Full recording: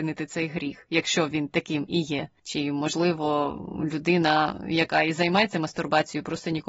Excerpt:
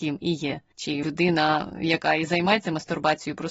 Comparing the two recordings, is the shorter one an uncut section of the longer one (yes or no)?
no